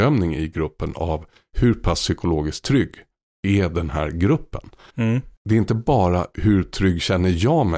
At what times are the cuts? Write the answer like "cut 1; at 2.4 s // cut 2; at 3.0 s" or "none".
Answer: none